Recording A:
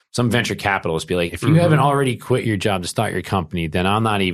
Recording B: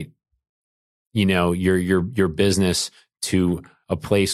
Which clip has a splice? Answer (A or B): A